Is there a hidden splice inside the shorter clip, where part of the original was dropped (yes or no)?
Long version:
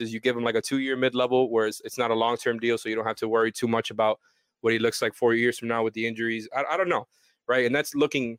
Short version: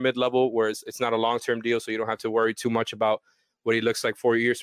no